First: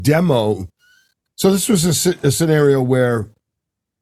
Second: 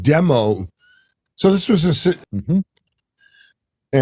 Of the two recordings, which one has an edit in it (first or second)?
second